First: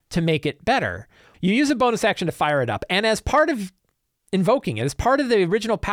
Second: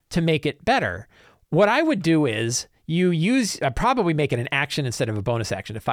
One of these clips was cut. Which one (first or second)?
first